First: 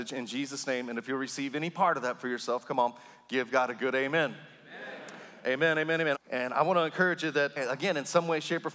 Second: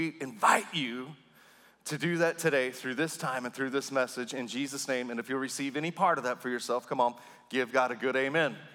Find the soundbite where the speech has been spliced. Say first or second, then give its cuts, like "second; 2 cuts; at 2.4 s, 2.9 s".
first; 2 cuts; at 6.1 s, 7.6 s